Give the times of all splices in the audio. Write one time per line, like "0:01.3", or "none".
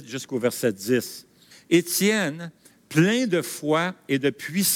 0:01.5